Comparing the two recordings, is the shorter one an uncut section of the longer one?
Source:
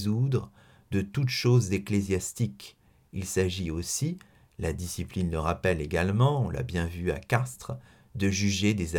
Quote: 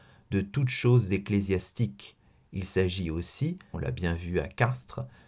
no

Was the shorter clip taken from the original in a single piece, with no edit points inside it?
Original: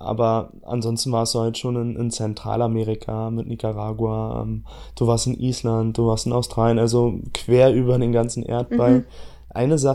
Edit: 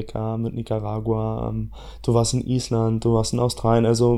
yes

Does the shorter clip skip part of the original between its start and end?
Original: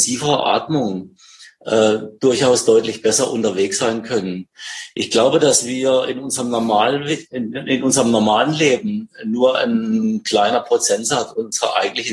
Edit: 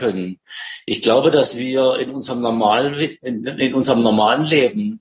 no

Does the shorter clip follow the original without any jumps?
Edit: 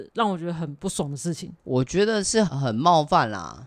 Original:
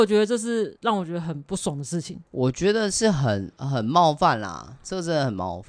no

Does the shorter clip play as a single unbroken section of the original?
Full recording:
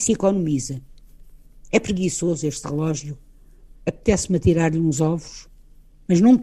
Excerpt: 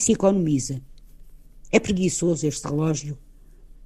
yes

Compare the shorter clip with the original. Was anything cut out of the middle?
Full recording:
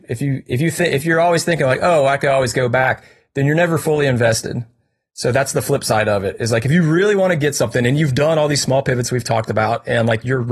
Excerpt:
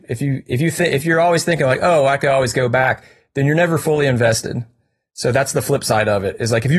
no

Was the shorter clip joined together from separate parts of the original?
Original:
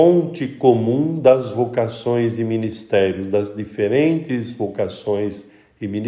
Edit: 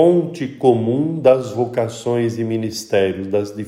no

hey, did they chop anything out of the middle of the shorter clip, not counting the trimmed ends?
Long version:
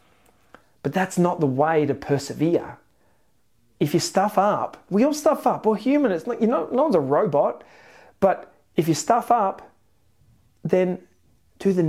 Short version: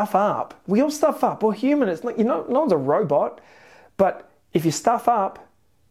no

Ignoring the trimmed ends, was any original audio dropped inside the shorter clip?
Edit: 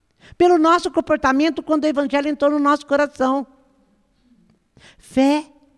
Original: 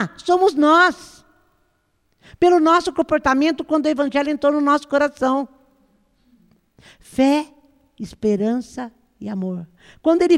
no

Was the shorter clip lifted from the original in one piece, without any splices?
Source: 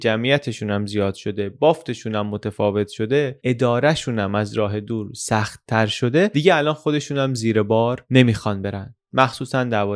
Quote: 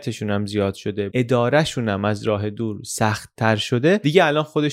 no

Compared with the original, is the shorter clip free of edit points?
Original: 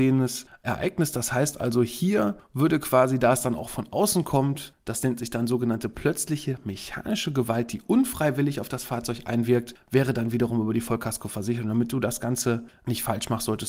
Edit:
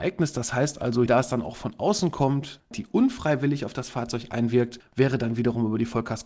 no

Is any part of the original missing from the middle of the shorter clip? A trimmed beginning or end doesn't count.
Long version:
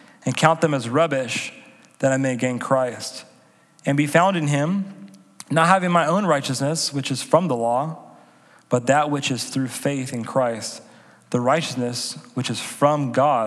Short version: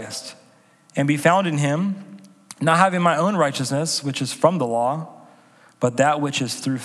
no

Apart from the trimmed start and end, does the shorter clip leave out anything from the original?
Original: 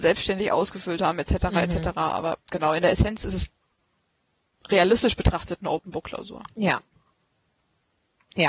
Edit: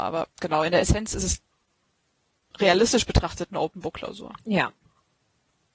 no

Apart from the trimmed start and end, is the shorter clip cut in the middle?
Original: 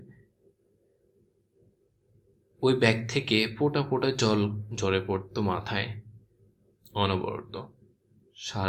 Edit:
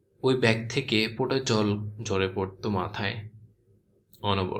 yes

